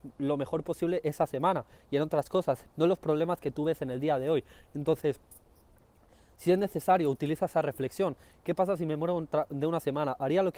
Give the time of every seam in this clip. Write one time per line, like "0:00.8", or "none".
0:02.7